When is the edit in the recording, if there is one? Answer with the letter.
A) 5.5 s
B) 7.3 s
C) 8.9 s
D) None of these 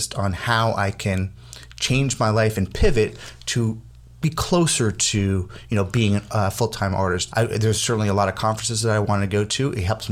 B